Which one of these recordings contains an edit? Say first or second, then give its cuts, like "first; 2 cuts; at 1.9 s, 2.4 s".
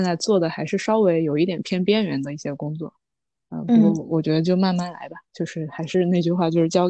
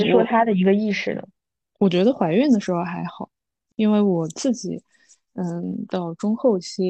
second; 1 cut; at 5.9 s